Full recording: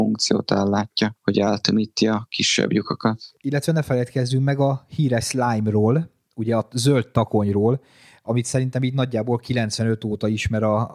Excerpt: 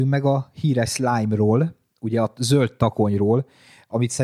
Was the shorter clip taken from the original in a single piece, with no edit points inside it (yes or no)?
yes